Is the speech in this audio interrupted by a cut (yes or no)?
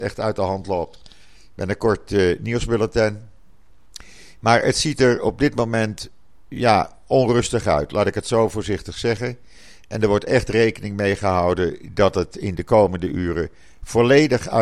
no